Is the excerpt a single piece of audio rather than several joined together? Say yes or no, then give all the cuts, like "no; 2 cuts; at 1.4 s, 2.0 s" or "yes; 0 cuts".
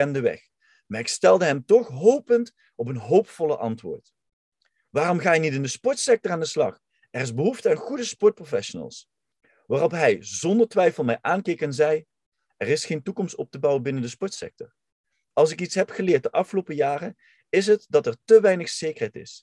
yes; 0 cuts